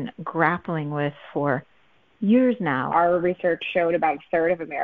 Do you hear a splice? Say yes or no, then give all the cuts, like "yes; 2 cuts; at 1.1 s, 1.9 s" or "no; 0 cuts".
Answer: yes; 1 cut; at 2.9 s